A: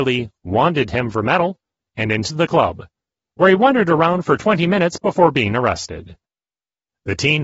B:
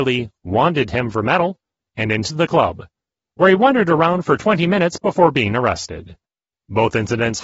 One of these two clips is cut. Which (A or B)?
B